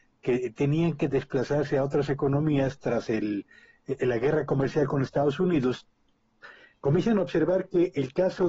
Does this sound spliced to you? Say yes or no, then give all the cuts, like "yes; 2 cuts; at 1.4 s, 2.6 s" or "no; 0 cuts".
no; 0 cuts